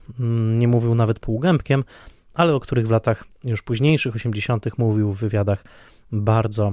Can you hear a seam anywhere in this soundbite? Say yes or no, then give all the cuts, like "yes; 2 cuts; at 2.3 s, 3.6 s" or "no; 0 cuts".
no; 0 cuts